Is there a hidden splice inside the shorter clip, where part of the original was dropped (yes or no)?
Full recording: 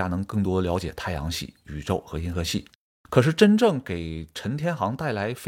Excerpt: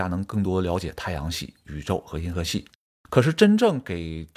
no